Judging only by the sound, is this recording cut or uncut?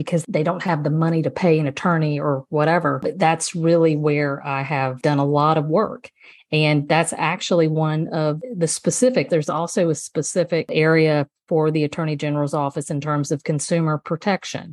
cut